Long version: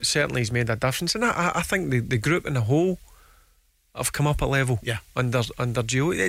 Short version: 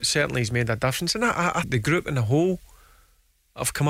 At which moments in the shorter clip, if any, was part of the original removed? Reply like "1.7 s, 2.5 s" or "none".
1.6 s